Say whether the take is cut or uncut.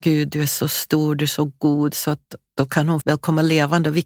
cut